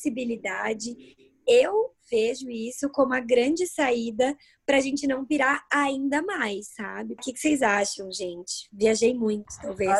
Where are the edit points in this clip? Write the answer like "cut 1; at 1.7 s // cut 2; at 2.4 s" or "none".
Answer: cut 1; at 7.2 s